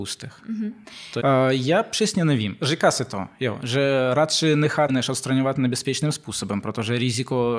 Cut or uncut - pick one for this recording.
cut